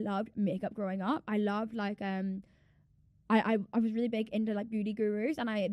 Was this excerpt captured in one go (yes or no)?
yes